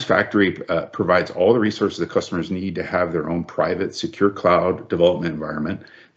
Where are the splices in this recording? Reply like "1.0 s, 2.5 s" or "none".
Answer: none